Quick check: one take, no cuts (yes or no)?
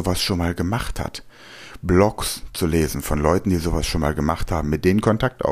yes